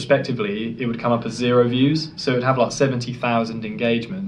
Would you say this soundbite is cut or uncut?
uncut